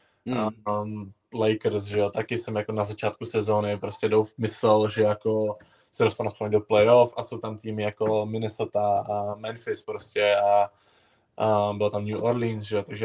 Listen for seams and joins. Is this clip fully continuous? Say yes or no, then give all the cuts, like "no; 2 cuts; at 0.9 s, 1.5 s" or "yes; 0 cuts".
yes; 0 cuts